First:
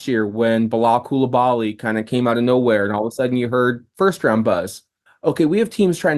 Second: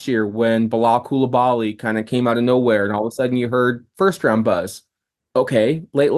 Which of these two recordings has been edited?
first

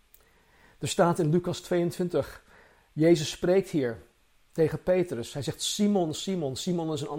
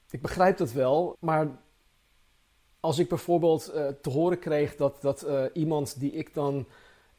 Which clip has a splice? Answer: second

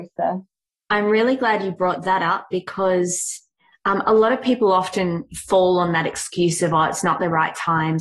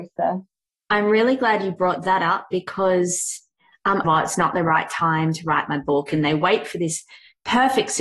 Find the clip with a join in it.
second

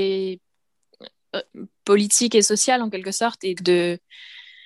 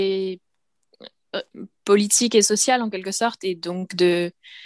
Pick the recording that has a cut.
first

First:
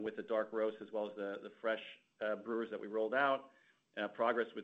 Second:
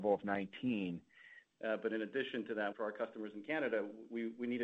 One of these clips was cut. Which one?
second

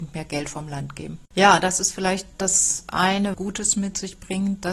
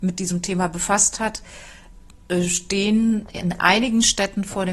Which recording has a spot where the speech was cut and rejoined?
first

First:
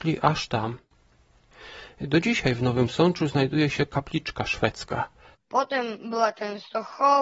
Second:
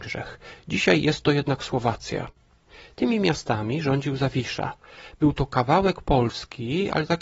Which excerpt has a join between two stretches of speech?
first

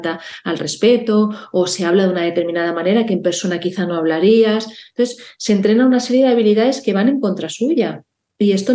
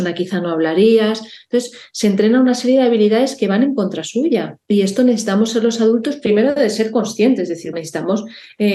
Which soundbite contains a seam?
second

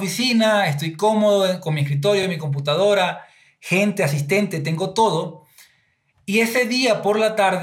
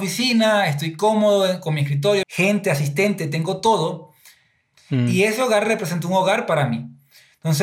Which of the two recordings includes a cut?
second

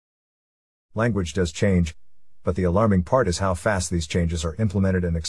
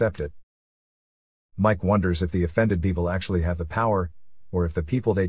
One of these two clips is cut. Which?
second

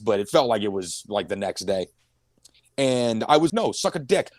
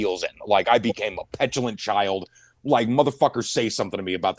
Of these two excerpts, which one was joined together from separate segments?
first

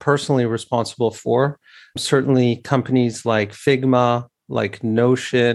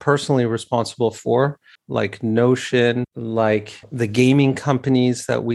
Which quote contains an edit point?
second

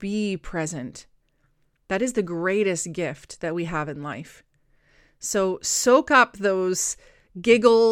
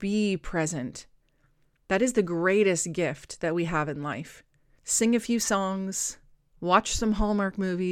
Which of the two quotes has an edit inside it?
second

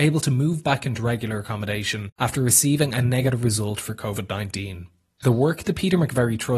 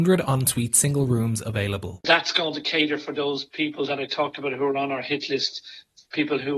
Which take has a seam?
first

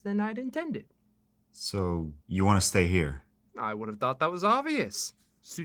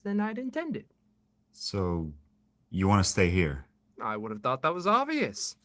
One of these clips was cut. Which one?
first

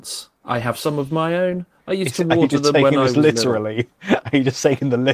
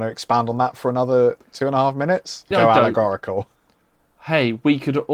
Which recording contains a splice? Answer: second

